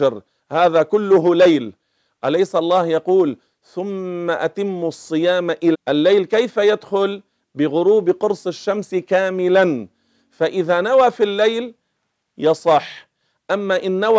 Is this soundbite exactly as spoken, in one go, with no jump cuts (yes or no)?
no